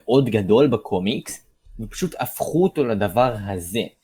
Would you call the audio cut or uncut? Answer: uncut